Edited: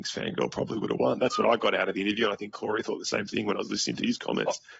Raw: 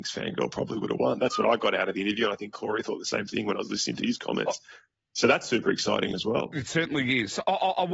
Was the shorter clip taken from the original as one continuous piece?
yes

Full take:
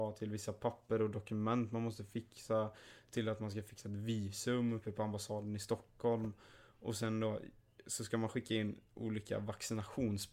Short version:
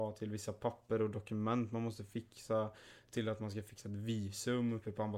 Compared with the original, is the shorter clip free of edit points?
yes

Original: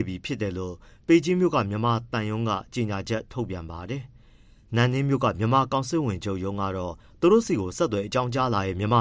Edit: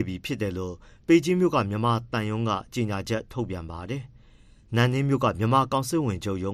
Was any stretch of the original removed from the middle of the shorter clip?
no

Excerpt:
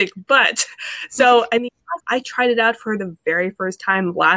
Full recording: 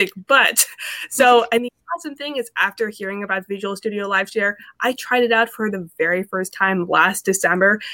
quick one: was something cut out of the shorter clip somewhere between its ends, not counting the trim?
yes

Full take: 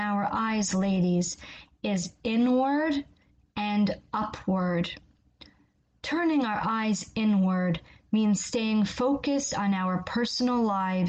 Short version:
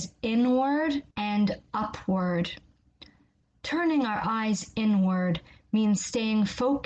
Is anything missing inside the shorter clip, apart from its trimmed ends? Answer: yes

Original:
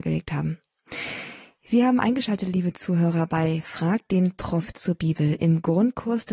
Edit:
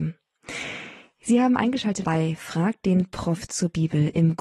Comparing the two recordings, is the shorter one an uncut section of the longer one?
no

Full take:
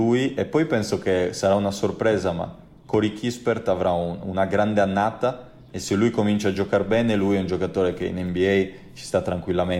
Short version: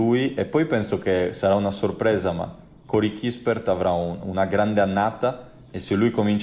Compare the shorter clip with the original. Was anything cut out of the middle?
no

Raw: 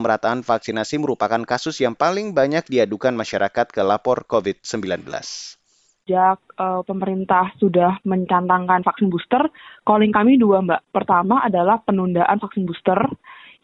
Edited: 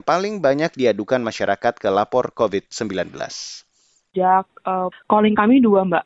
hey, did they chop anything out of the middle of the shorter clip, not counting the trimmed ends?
yes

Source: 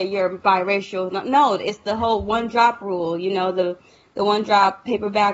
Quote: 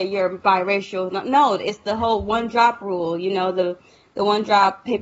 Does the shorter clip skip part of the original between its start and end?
no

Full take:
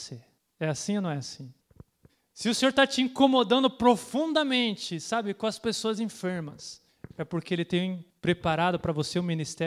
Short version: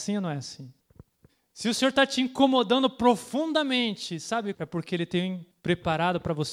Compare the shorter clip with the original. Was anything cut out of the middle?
yes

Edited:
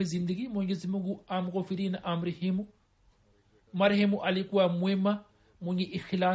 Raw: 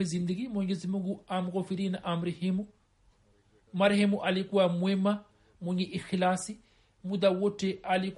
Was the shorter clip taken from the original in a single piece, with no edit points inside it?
yes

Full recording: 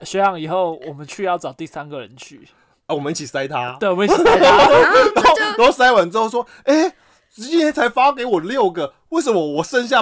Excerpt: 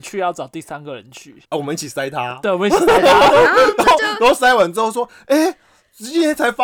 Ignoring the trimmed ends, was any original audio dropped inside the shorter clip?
yes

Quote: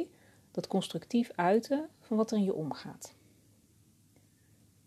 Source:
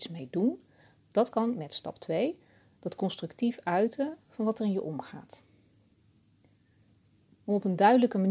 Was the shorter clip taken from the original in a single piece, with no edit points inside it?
yes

